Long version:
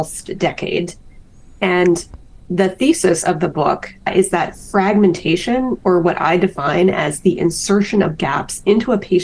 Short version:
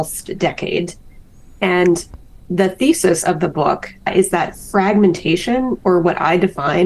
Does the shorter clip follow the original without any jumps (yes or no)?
yes